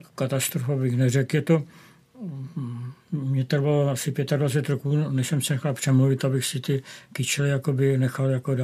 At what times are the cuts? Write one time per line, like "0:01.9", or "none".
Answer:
none